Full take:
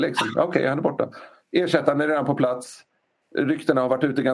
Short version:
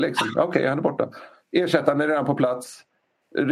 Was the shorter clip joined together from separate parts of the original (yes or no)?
no